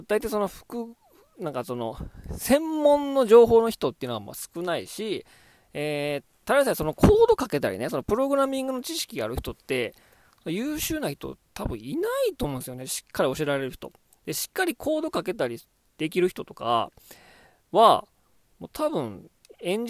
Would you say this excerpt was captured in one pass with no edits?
yes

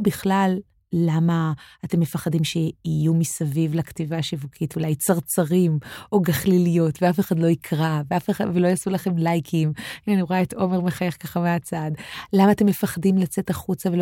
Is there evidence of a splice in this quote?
no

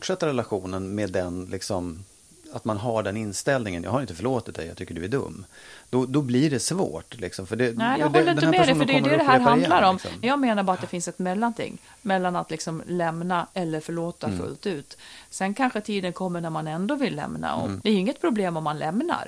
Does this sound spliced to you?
yes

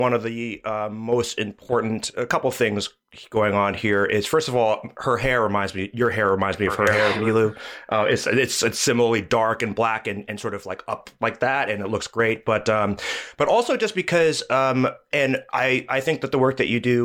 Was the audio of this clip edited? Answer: no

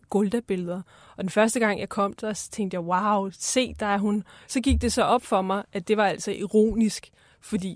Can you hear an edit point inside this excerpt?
yes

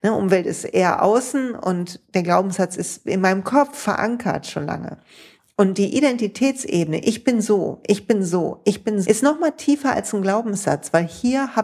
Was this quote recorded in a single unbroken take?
no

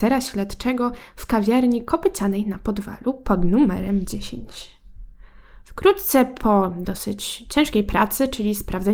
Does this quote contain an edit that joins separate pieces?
no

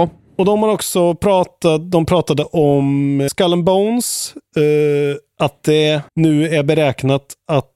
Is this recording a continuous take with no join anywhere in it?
no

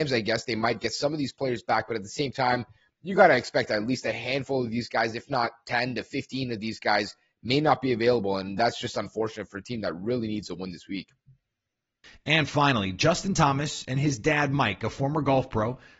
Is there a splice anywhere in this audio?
no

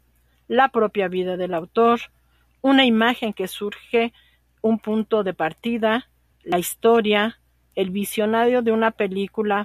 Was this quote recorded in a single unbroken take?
yes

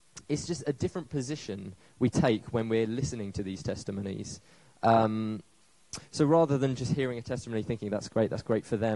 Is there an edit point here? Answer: no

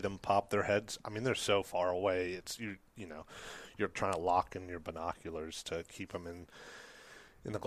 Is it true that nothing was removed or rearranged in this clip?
yes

